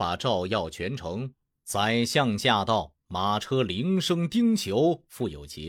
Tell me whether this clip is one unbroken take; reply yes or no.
yes